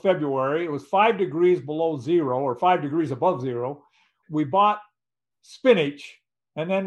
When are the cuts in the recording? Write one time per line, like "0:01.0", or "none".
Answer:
0:04.2